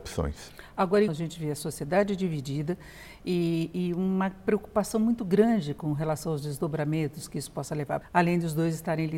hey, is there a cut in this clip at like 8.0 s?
yes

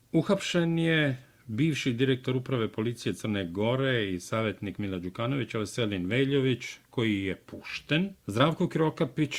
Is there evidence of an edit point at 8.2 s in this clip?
yes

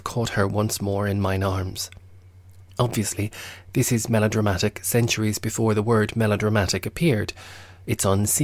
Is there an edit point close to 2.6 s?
yes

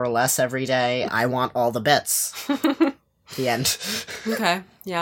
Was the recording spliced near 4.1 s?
no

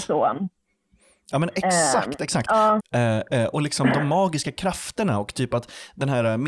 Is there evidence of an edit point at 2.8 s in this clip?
yes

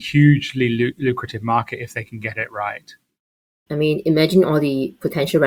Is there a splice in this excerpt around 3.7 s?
yes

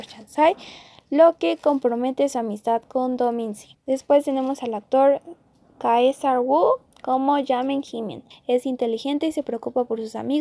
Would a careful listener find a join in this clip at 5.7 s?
no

